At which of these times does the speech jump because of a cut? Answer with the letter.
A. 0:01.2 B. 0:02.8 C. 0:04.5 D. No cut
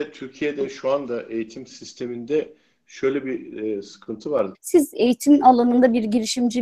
C